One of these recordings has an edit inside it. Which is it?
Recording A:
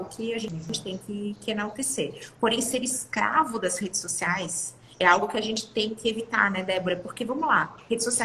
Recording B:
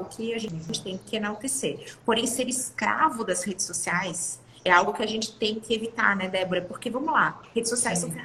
B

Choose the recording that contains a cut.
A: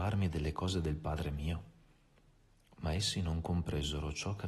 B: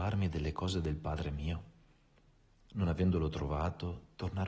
B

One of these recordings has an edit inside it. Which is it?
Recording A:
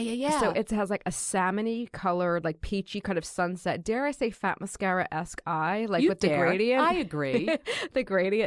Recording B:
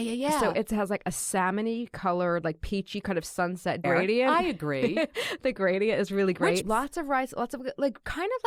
B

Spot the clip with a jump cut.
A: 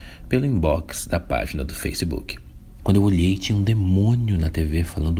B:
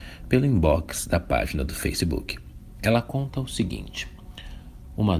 A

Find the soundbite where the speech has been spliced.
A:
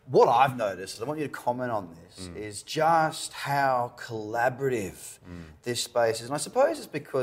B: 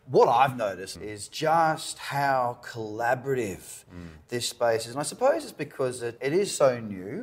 B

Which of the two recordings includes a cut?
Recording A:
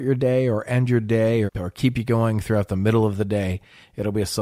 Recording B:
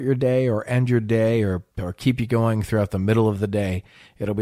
A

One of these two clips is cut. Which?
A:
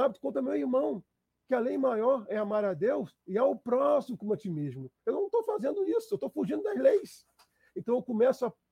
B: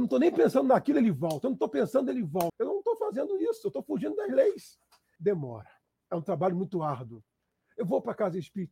B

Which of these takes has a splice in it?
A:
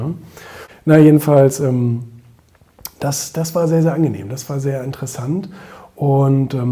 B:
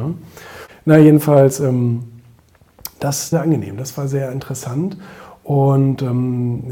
B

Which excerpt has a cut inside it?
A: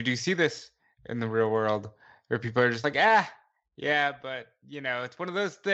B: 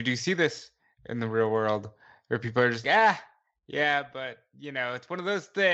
B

